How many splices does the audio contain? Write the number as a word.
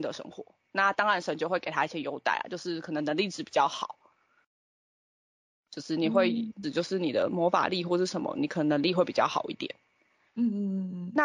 one